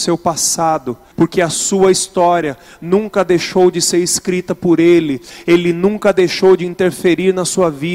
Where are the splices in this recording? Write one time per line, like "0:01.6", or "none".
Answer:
0:01.1